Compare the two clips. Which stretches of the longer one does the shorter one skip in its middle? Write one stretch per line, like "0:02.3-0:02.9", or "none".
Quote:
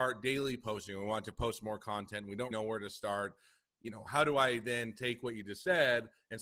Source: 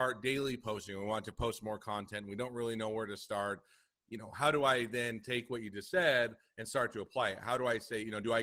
0:02.5-0:02.8